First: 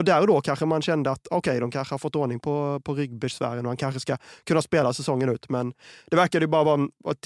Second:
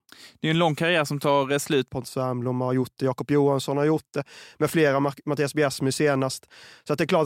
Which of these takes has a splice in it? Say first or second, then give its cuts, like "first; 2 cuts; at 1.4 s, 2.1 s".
second; 1 cut; at 1.9 s